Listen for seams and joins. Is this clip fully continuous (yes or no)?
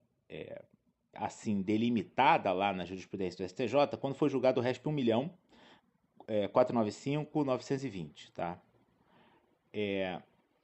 no